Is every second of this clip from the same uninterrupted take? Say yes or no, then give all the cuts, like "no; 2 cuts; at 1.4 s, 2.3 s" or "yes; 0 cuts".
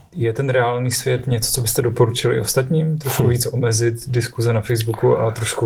yes; 0 cuts